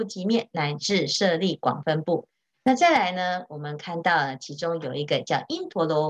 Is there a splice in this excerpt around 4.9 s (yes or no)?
no